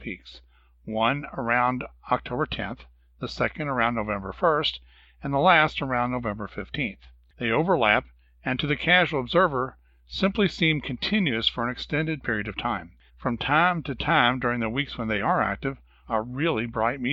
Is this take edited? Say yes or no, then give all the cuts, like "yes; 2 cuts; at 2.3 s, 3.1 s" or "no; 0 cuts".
yes; 3 cuts; at 7.3 s, 13.1 s, 16.0 s